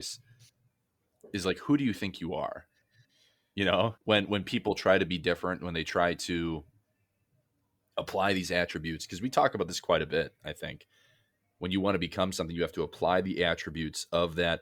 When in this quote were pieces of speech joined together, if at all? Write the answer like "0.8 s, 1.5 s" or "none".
4.0 s